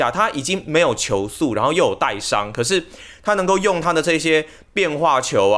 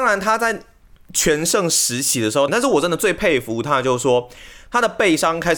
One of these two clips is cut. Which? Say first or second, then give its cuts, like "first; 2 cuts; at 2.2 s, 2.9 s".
second; 1 cut; at 2.5 s